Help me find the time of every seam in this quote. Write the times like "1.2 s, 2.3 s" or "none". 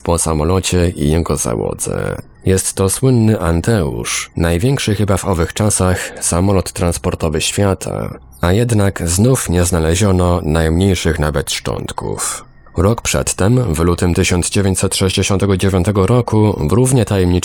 2.3 s